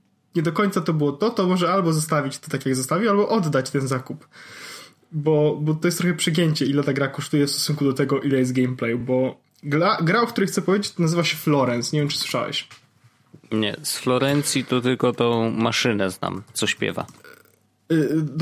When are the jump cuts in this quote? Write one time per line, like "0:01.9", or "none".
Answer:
none